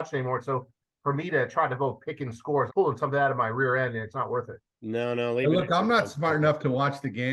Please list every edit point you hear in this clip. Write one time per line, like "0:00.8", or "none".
0:02.7
0:04.1